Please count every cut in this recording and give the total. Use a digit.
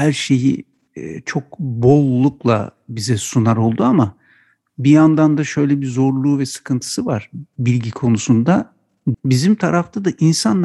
1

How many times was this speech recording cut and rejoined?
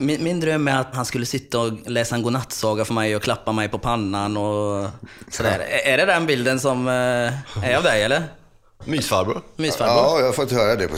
1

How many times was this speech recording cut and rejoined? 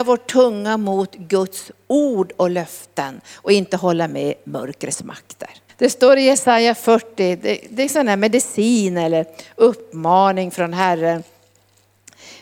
1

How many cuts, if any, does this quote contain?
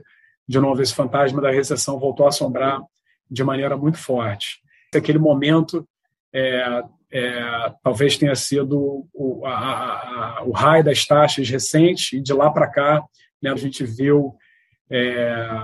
2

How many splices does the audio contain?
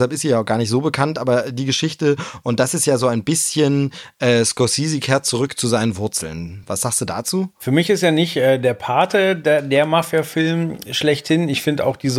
0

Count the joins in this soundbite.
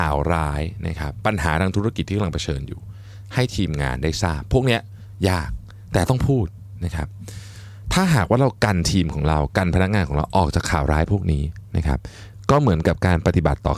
0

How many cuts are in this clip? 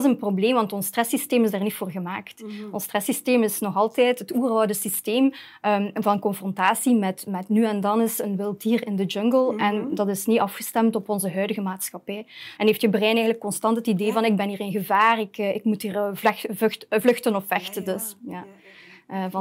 1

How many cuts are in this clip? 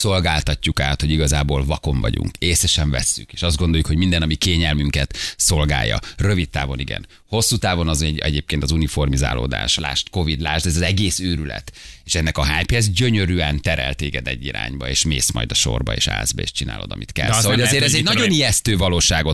1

